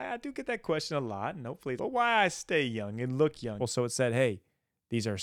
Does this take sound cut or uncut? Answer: cut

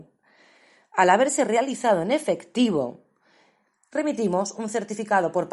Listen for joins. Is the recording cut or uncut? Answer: uncut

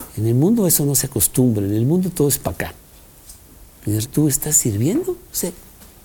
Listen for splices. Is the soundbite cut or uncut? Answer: cut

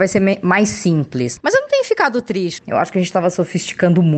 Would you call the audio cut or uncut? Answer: cut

